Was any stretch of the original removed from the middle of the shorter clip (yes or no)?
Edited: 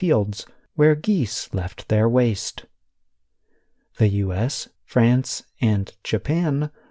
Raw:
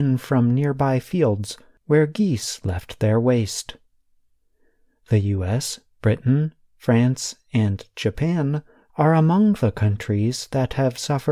yes